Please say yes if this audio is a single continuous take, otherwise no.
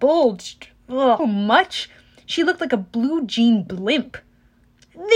no